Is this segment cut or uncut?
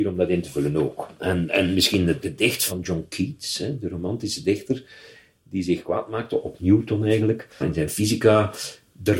cut